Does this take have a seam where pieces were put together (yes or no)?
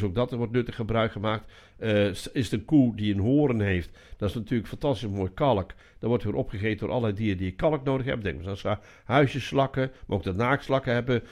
no